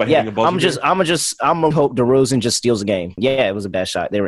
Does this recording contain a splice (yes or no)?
yes